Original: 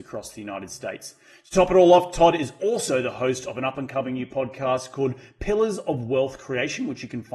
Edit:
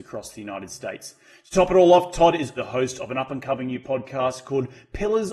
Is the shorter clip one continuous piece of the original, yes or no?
no